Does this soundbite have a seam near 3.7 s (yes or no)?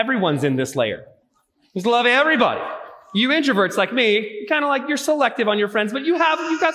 no